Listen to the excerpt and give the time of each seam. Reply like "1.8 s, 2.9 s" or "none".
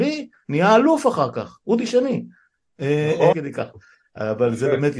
3.3 s